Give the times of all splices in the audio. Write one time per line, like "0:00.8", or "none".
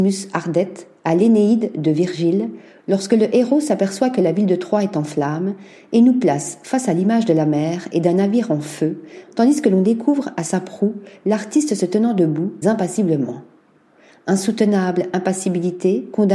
0:09.2
0:12.6

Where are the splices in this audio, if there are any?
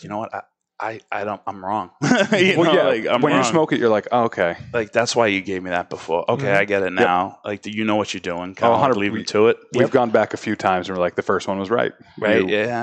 none

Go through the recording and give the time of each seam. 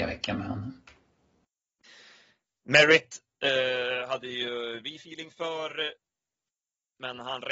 none

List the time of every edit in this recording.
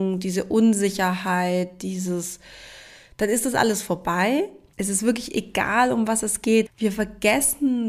0:04.7
0:06.7

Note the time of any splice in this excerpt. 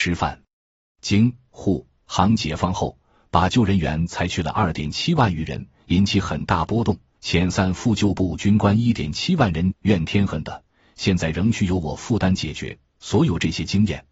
0:07.2
0:09.7

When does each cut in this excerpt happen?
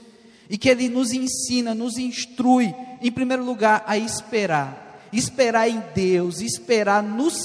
none

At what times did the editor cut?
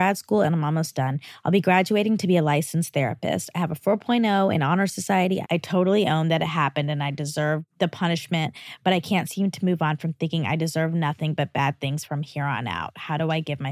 0:05.4

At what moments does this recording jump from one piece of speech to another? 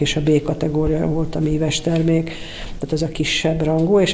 none

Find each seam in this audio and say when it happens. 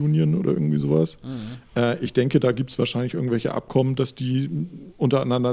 none

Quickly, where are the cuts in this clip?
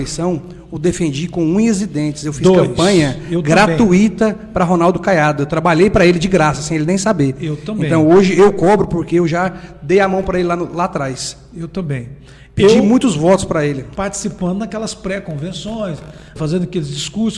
0:13.9
0:16.4

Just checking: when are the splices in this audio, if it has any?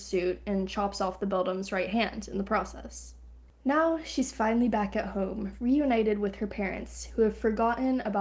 none

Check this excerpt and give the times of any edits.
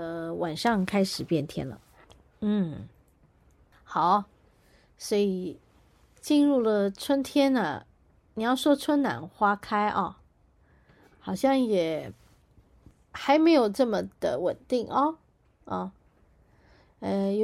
none

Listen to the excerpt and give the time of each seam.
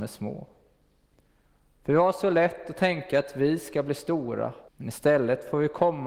0:04.7

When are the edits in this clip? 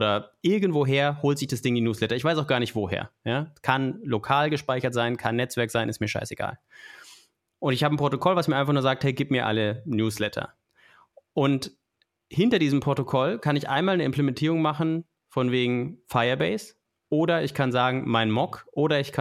none

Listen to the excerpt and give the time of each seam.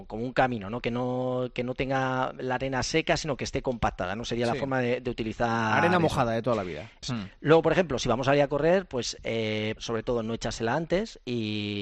0:07.0
0:09.8

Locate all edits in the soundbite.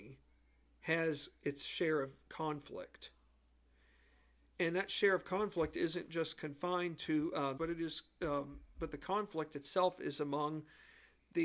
0:07.6

